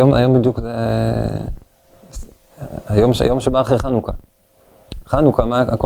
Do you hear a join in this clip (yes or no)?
no